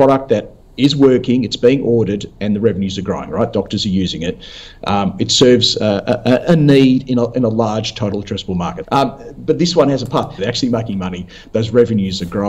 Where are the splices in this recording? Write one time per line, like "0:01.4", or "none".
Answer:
0:08.8
0:10.4

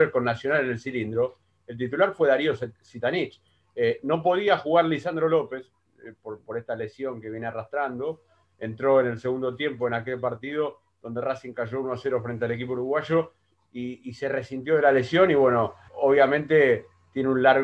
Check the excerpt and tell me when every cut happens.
0:15.9

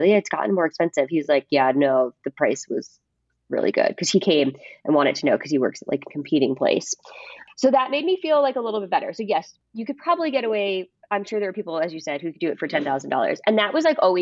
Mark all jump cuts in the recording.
none

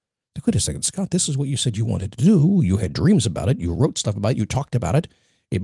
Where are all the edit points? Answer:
none

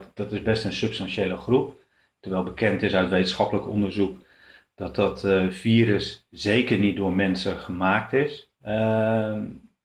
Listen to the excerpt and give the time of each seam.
0:08.5

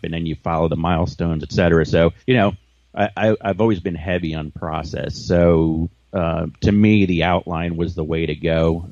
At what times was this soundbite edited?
0:02.2

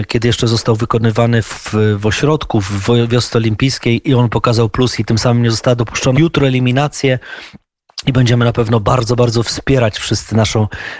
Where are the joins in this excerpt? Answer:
0:06.1

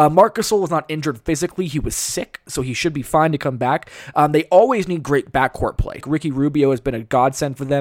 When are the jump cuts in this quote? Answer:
0:06.0

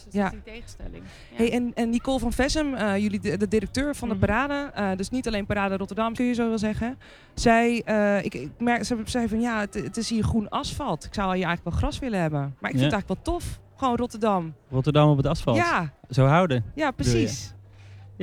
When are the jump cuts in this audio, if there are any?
0:06.1

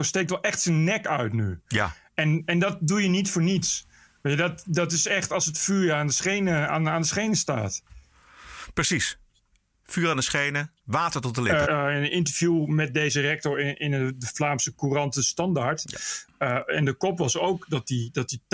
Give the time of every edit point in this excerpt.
0:11.6

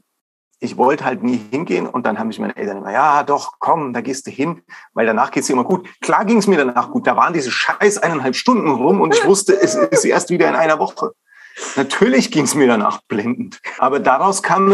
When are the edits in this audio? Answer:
0:13.8

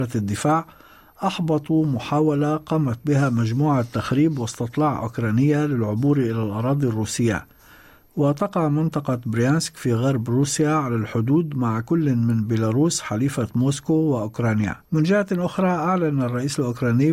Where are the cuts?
0:14.8

